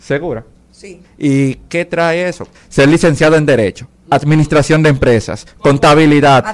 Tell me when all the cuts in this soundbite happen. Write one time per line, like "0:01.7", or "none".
0:01.0
0:02.5